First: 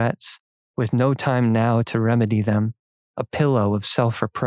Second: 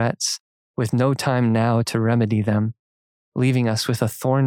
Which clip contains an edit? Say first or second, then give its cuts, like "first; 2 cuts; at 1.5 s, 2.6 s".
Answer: first; 1 cut; at 3.0 s